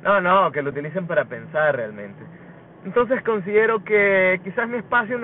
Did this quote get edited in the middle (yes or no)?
no